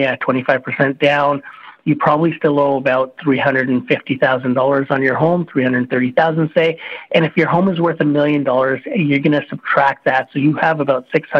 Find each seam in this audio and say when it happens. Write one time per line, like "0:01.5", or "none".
none